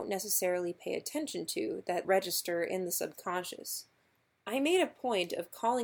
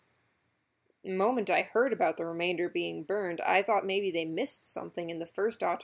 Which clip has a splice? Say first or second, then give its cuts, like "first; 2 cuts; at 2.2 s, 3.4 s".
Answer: first; 1 cut; at 2.0 s